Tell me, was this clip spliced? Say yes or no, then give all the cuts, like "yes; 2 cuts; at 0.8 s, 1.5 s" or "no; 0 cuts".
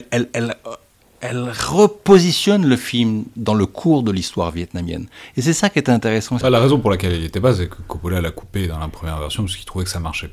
yes; 1 cut; at 6.4 s